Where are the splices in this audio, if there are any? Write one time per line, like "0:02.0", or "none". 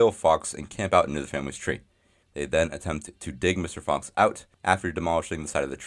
0:02.2
0:04.5